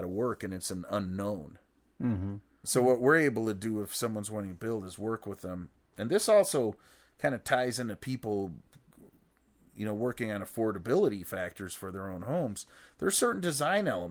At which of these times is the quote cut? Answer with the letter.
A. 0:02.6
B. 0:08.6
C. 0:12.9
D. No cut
A